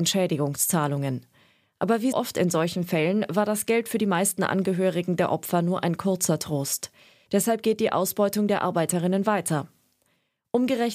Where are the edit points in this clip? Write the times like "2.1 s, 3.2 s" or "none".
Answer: 2.1 s, 7.3 s